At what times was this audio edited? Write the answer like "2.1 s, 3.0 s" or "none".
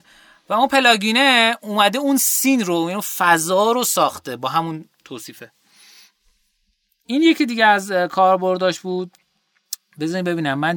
none